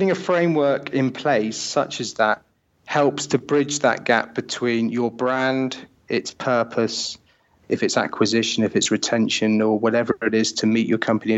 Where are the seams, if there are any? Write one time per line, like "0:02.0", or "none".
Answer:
0:07.6